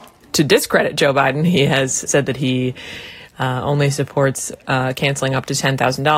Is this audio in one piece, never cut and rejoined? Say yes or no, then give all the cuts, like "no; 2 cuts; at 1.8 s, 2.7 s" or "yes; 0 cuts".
no; 1 cut; at 2.1 s